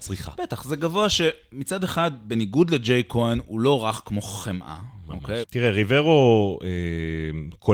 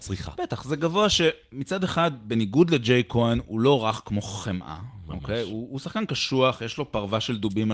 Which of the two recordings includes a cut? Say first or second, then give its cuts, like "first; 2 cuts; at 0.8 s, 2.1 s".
first; 1 cut; at 5.4 s